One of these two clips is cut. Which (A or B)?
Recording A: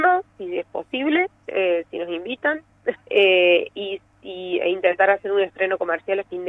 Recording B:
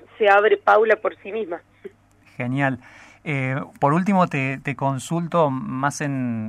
A